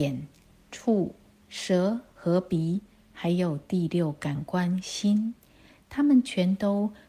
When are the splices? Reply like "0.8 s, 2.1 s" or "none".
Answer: none